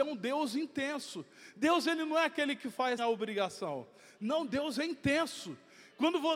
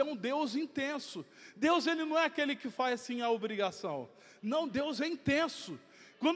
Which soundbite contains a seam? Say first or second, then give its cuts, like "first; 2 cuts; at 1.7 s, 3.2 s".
first; 1 cut; at 3.0 s